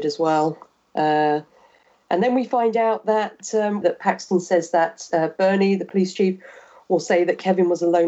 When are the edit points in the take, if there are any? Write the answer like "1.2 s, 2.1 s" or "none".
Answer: 3.8 s